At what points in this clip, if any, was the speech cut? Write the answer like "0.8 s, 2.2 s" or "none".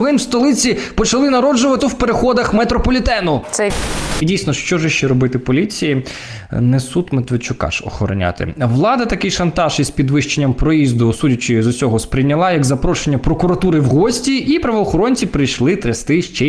1.8 s, 3.4 s